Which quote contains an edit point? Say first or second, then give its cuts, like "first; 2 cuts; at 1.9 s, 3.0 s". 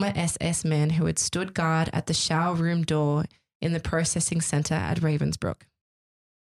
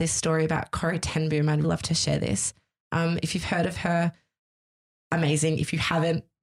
second; 1 cut; at 1.6 s